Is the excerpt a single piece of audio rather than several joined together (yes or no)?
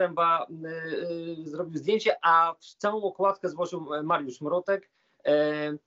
yes